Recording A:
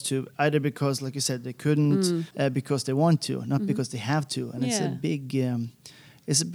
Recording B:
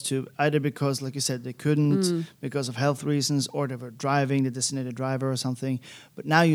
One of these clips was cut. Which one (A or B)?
A